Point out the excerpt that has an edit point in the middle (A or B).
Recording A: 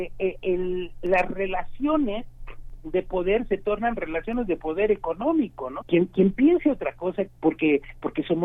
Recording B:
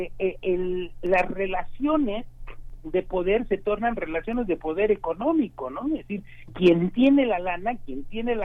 A